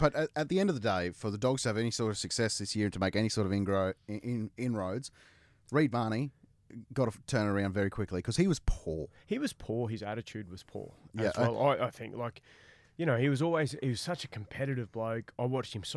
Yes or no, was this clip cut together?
no